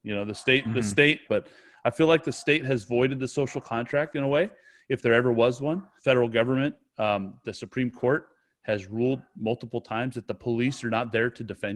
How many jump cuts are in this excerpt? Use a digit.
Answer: 2